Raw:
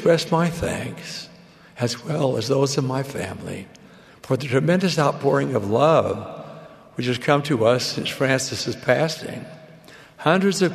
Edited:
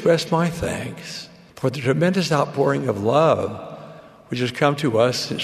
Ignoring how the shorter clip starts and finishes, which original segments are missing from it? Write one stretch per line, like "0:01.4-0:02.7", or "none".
0:01.5-0:04.2